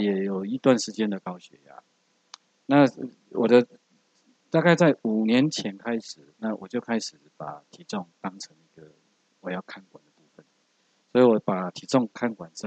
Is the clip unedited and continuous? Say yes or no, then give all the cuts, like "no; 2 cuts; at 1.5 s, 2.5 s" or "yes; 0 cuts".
yes; 0 cuts